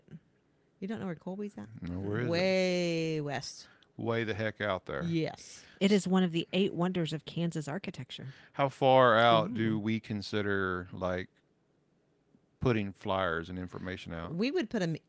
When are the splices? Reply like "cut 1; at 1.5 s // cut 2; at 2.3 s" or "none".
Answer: none